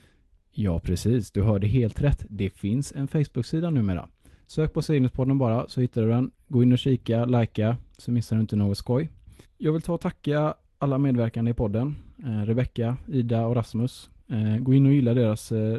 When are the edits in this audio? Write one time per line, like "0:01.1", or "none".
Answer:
0:09.4